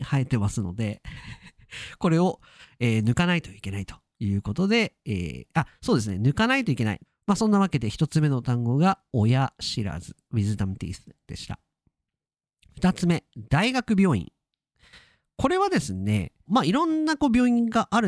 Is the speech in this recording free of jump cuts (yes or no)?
no